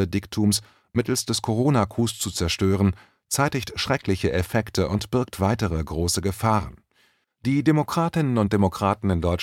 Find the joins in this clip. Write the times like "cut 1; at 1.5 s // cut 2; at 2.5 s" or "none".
cut 1; at 7.2 s